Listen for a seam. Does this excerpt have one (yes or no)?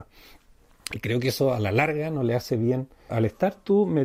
yes